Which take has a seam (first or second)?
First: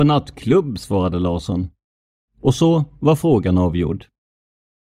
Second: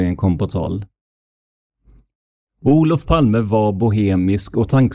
first